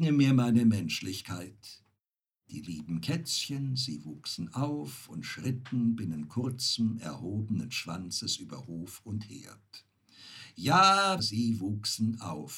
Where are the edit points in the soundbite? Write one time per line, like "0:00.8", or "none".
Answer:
0:11.2